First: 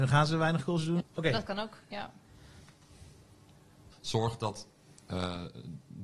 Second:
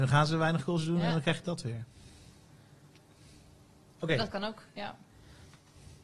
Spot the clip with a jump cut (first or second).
first